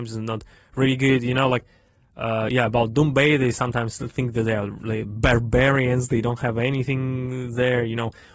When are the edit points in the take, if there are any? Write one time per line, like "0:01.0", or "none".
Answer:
none